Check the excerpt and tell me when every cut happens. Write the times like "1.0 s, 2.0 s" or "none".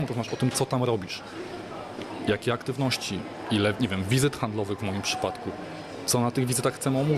none